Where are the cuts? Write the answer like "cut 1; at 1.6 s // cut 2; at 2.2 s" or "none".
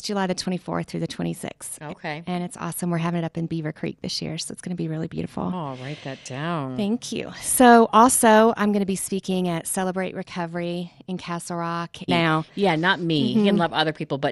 cut 1; at 12.1 s